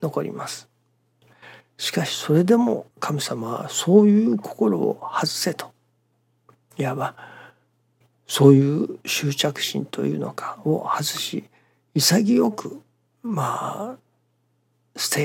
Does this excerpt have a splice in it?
yes; 1 cut; at 2.9 s

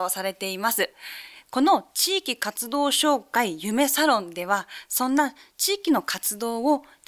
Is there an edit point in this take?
no; 0 cuts

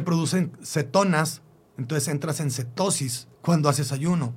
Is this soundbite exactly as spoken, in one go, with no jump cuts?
no; 1 cut; at 3.3 s

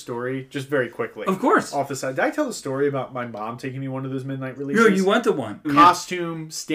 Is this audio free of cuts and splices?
no; 1 cut; at 5.6 s

